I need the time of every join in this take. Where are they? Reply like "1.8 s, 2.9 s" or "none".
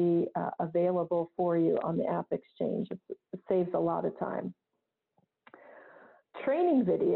none